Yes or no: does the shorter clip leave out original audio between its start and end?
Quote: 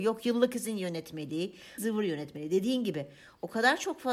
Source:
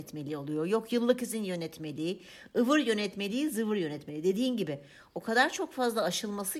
yes